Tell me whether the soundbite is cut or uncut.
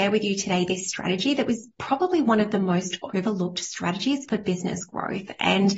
uncut